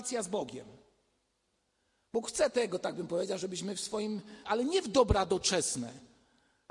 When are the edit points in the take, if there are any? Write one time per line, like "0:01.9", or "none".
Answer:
0:04.4

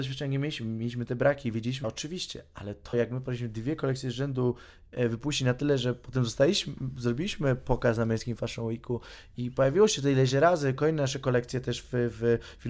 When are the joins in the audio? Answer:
0:01.8
0:02.9

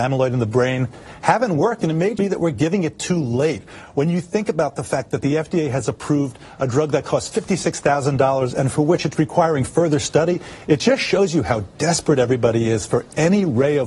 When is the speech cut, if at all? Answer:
0:02.2

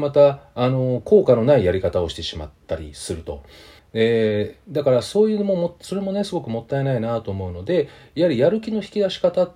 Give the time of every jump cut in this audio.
0:03.8

